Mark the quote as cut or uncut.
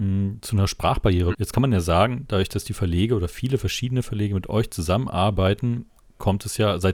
cut